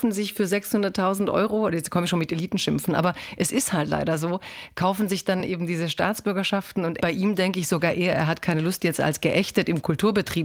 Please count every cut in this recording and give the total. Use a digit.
0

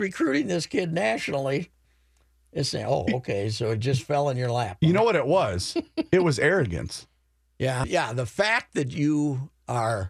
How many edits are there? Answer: 1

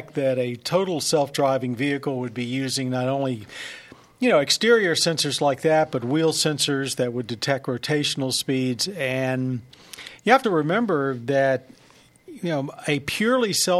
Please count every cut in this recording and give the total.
1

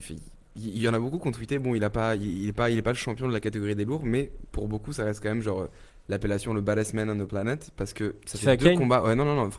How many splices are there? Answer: 0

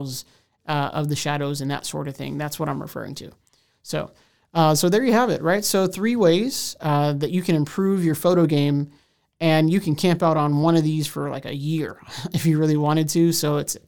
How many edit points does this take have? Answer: 0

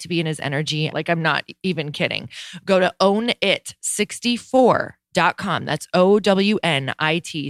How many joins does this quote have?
1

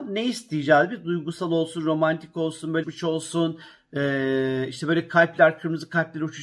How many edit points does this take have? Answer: 1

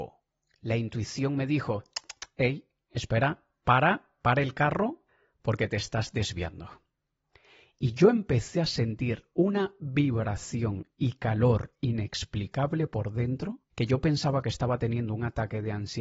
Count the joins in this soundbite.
1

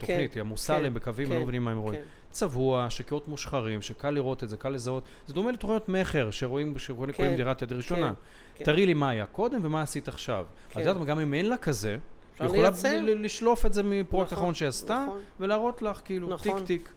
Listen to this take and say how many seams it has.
1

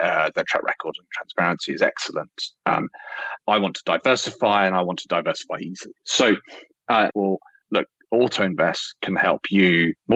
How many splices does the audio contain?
2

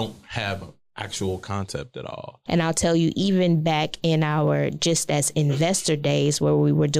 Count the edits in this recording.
1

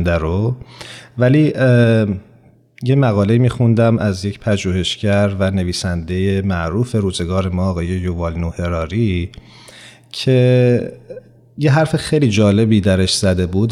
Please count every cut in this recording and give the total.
0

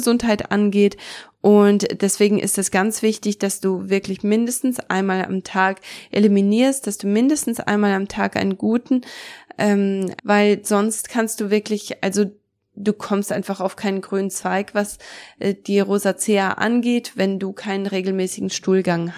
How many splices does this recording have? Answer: 1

